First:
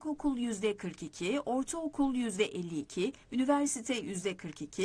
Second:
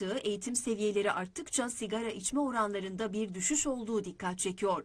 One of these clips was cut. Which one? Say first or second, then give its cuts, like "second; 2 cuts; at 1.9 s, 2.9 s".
first; 1 cut; at 3.2 s